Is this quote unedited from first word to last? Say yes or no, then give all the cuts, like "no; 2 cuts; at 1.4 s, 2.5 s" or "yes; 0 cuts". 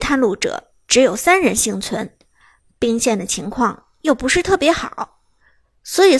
yes; 0 cuts